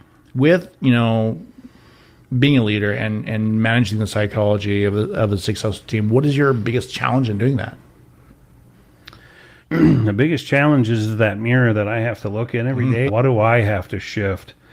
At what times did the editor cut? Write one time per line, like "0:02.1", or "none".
0:09.6
0:13.1